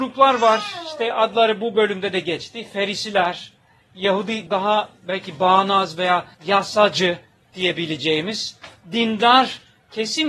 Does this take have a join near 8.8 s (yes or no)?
no